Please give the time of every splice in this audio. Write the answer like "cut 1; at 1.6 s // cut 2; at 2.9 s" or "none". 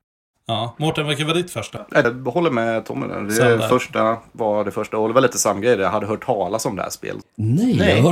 cut 1; at 2.0 s // cut 2; at 7.2 s